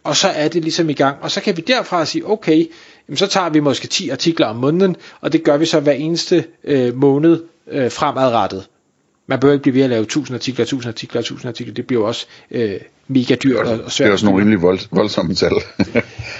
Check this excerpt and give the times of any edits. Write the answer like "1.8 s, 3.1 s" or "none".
none